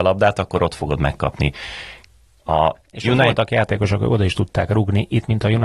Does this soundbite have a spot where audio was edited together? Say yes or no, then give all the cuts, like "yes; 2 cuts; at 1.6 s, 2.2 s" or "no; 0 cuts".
no; 0 cuts